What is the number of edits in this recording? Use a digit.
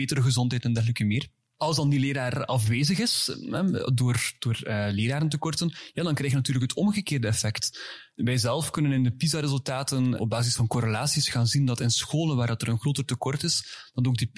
0